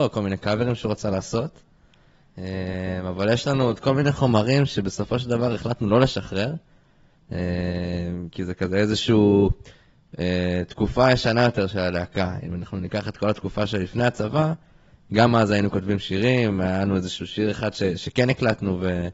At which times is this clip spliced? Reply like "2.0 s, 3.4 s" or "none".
none